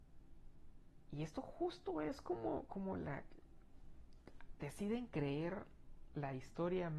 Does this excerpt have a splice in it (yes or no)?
yes